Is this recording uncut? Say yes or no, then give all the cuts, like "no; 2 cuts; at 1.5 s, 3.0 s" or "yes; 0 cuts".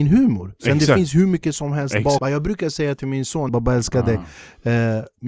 no; 2 cuts; at 2.2 s, 3.5 s